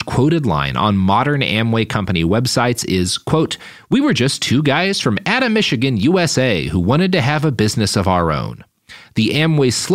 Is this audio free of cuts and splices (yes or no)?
yes